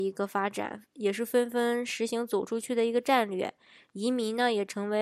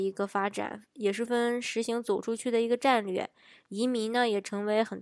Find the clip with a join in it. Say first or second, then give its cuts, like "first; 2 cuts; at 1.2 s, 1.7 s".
second; 1 cut; at 1.3 s